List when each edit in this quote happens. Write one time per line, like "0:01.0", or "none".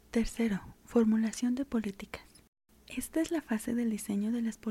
none